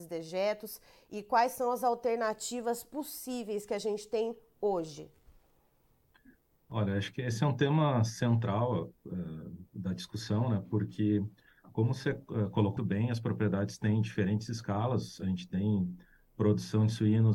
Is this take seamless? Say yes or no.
no